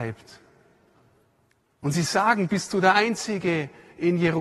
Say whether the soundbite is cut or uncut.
uncut